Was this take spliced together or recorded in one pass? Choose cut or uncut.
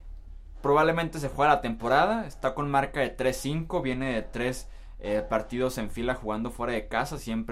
uncut